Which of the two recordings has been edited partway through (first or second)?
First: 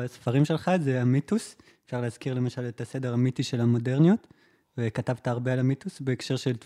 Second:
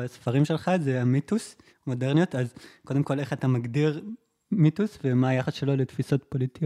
second